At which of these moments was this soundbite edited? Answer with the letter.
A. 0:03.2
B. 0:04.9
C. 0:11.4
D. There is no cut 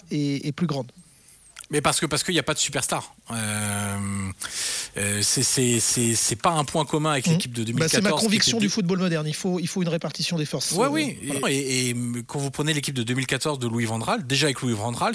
C